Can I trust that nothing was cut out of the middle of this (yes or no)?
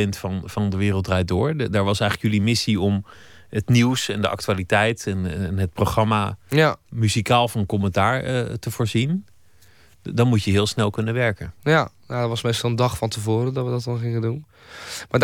yes